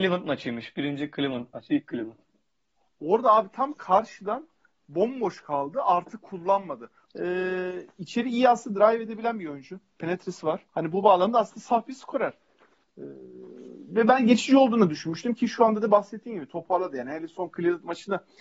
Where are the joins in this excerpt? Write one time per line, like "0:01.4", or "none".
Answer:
0:07.1
0:10.7